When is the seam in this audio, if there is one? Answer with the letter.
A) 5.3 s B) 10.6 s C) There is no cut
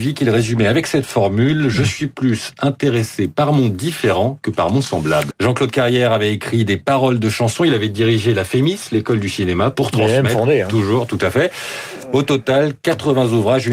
A